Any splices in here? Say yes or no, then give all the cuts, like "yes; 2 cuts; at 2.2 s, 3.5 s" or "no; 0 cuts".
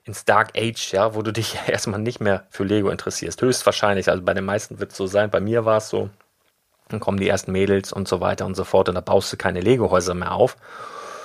no; 0 cuts